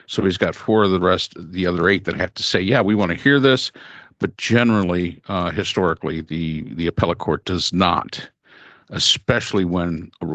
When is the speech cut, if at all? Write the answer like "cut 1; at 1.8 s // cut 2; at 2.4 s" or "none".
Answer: none